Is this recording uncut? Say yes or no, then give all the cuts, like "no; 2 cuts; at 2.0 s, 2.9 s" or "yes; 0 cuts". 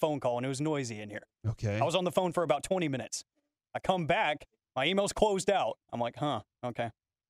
no; 1 cut; at 5.8 s